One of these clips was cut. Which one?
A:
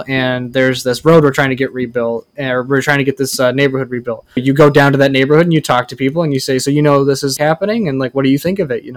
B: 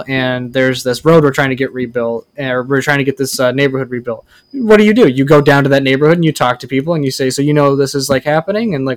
A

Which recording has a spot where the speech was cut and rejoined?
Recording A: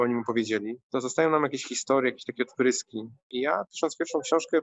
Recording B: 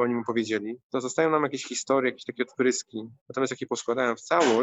B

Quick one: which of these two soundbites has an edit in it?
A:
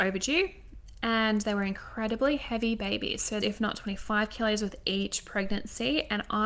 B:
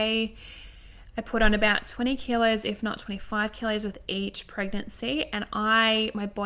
A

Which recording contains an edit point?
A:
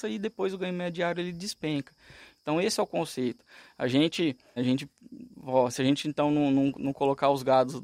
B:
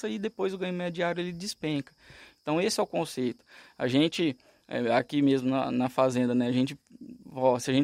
A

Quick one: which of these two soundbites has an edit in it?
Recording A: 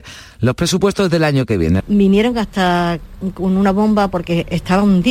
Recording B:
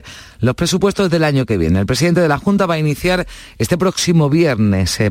A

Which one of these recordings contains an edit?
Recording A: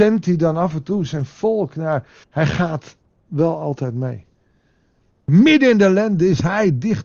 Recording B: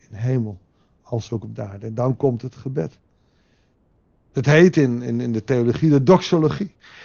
A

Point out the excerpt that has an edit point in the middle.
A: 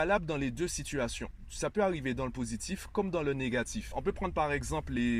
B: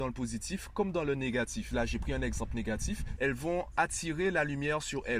B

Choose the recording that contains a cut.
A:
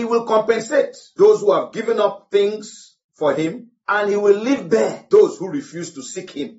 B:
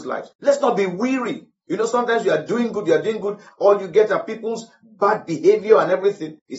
B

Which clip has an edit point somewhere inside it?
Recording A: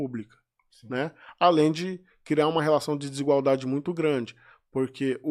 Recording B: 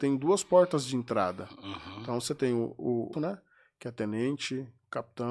B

